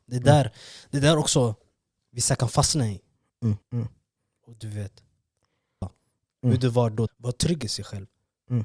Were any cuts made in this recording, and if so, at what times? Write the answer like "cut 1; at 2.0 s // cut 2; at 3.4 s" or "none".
cut 1; at 3.6 s // cut 2; at 5.8 s // cut 3; at 7.1 s